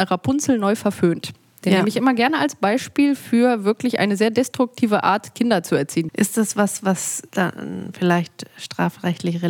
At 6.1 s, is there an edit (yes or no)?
yes